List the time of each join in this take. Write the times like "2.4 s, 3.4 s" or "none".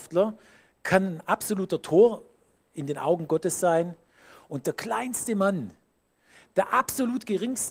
none